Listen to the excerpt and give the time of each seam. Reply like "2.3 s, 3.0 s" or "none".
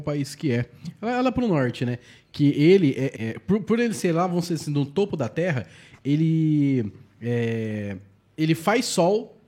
3.2 s